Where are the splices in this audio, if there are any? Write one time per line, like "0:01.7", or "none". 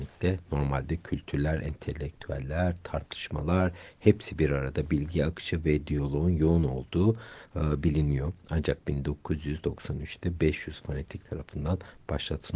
none